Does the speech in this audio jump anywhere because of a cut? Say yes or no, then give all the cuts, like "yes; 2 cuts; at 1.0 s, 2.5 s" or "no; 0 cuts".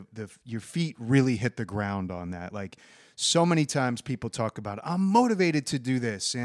no; 0 cuts